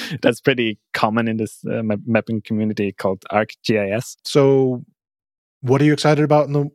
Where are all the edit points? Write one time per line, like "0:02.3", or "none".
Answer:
0:04.2